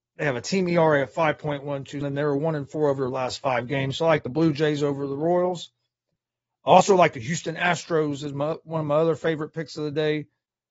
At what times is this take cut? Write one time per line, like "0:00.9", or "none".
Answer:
0:02.0